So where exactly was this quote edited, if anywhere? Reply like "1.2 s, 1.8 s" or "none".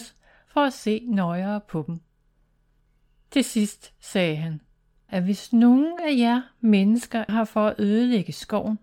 5.1 s, 7.3 s